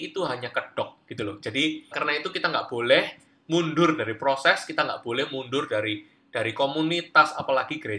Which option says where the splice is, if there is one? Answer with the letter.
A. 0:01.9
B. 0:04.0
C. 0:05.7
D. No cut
A